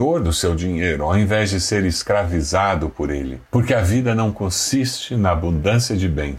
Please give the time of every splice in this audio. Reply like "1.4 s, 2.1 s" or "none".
3.5 s